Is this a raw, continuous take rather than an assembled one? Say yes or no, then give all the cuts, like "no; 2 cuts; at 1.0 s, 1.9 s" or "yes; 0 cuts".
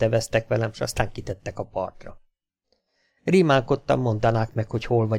yes; 0 cuts